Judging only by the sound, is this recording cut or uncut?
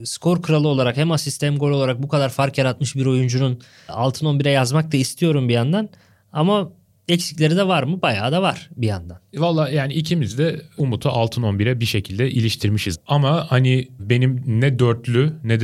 uncut